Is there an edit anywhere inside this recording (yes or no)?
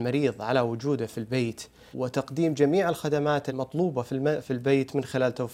yes